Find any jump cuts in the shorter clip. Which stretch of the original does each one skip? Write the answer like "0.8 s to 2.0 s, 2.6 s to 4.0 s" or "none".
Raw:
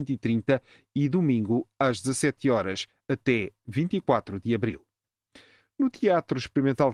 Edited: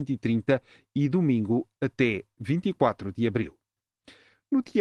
1.8 s to 3.0 s